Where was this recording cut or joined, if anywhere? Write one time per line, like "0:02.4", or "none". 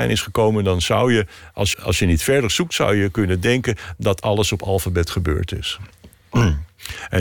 0:01.7